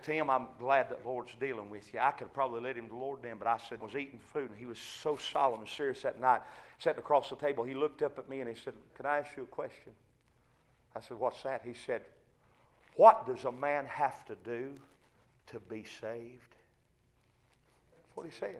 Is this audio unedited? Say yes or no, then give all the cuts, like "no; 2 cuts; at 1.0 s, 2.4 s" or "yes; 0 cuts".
no; 2 cuts; at 3.8 s, 8.9 s